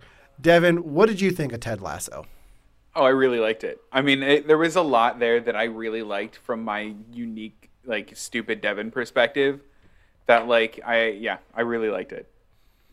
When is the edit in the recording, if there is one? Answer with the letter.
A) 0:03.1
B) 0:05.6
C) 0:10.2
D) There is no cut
D